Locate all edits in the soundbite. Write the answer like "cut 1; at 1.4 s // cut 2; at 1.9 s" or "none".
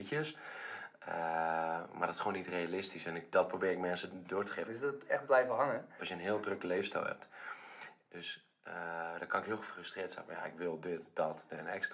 cut 1; at 4.7 s // cut 2; at 6.0 s // cut 3; at 8.0 s